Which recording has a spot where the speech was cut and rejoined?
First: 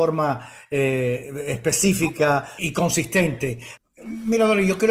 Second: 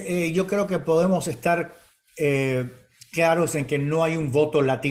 first; 2 cuts; at 2.6 s, 3.8 s

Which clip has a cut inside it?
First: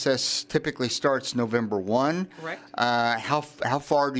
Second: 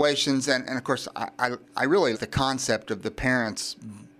second; 1 cut; at 2.1 s

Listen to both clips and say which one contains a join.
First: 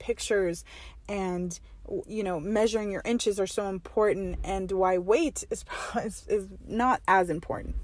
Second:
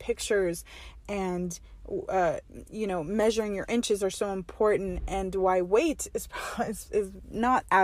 first; 1 cut; at 2.0 s

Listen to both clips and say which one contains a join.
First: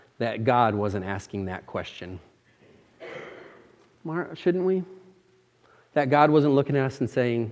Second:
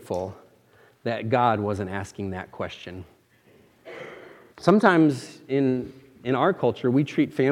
second; 1 cut; at 4.5 s

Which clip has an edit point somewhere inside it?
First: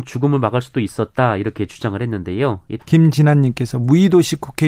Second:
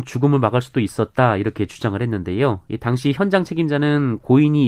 first; 1 cut; at 2.8 s

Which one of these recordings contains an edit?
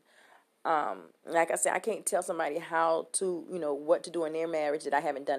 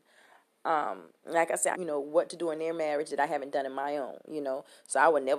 second; 1 cut; at 1.7 s

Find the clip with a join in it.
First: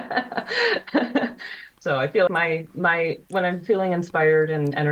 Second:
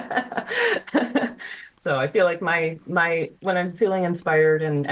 first; 1 cut; at 2.3 s

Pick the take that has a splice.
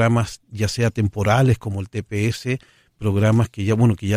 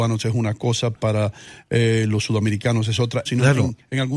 second; 1 cut; at 3.3 s

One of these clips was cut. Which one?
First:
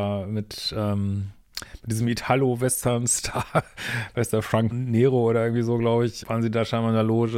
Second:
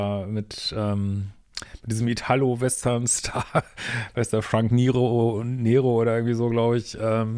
first; 2 cuts; at 4.7 s, 6.2 s

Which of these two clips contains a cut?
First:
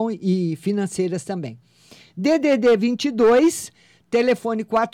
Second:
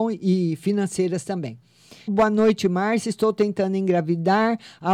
second; 1 cut; at 2.1 s

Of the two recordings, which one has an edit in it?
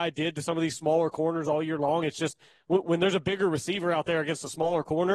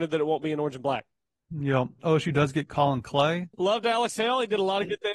second; 2 cuts; at 2.0 s, 3.5 s

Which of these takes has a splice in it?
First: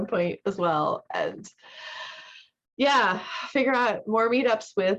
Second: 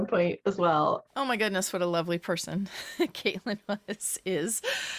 second; 1 cut; at 1.1 s

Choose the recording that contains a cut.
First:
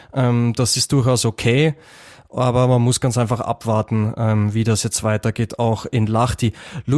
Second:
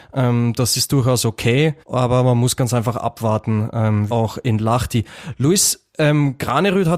second; 2 cuts; at 1.8 s, 4.1 s

